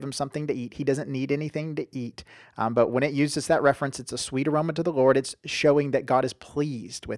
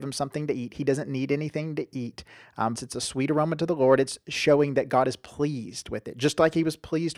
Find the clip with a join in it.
second; 1 cut; at 2.7 s

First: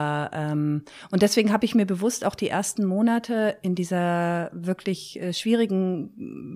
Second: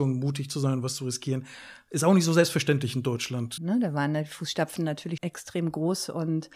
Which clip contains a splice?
second; 2 cuts; at 3.6 s, 5.2 s

